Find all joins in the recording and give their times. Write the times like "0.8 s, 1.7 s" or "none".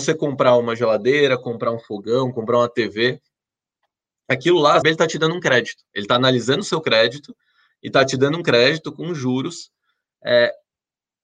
4.8 s, 5.9 s